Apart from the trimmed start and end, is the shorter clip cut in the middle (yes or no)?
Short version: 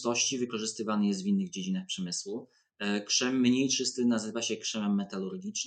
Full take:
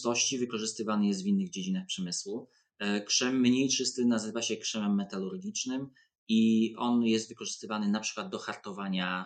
no